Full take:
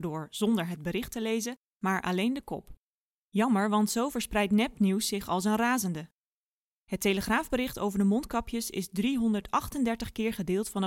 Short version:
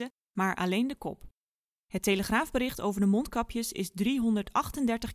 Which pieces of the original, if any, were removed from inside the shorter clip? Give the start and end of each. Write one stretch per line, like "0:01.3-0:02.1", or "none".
0:03.2-0:06.8